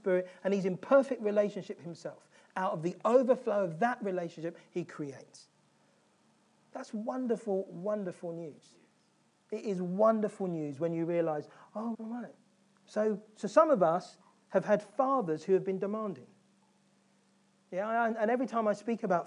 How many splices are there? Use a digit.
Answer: 1